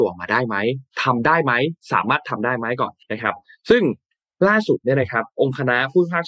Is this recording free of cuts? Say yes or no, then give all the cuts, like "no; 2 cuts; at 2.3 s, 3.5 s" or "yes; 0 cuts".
no; 1 cut; at 3.0 s